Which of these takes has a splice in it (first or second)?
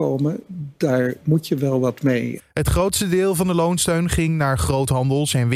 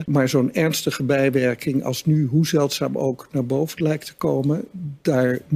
first